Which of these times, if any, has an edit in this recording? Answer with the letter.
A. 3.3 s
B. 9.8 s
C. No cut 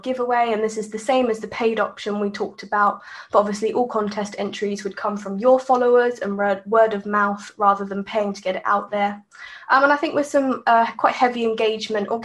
C